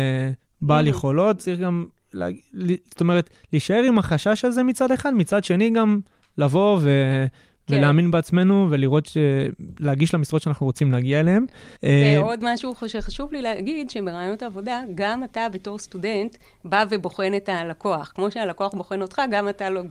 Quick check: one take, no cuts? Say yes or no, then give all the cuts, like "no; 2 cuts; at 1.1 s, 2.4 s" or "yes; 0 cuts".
no; 1 cut; at 11.8 s